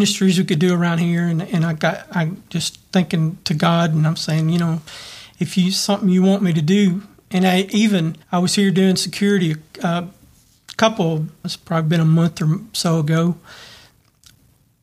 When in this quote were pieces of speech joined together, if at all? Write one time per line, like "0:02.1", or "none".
0:08.2
0:11.4